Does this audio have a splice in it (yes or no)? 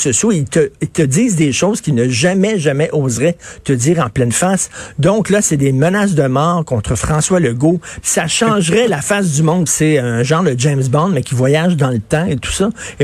yes